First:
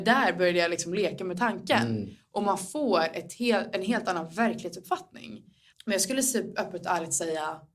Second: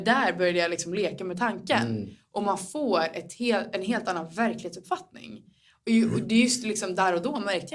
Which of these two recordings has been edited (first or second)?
first